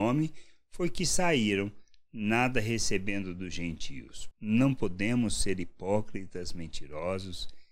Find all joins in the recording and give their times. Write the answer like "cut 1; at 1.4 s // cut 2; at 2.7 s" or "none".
cut 1; at 4.3 s